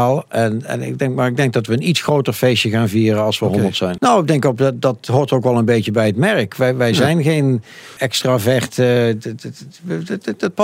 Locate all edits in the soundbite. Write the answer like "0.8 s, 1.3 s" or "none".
4.0 s, 8.0 s